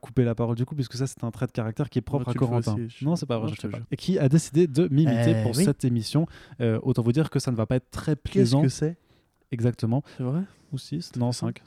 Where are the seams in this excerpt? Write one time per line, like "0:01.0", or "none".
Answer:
0:03.8
0:10.2